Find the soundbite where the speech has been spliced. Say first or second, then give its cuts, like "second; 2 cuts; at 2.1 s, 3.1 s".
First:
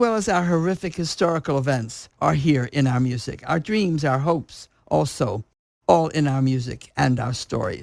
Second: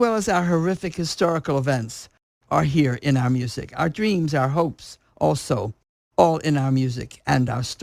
first; 1 cut; at 2.1 s